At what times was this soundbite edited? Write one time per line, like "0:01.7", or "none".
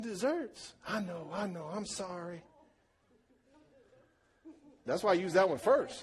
0:04.9